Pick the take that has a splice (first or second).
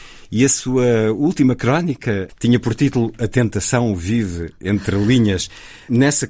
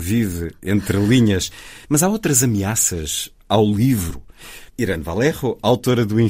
second